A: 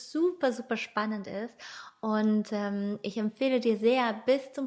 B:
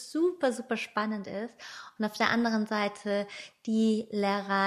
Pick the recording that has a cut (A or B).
B